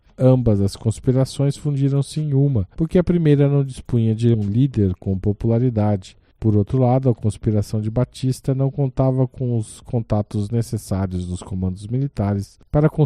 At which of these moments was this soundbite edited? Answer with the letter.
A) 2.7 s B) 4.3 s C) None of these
B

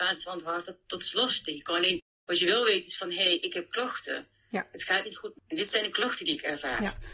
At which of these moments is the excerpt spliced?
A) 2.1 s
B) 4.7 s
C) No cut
C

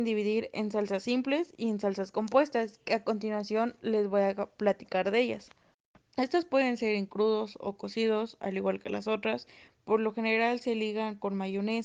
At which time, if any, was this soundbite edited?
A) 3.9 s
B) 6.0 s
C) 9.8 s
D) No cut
B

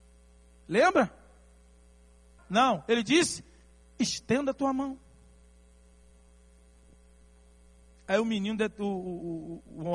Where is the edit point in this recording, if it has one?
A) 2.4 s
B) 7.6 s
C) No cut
A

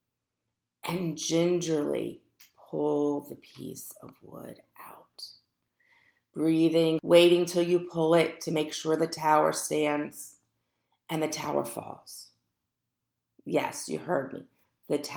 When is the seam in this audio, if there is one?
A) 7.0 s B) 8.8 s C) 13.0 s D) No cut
A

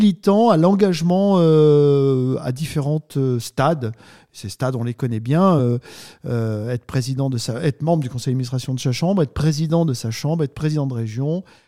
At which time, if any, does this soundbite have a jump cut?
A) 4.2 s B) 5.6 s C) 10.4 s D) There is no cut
D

